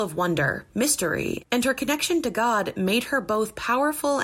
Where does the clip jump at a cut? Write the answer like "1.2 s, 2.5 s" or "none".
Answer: 1.4 s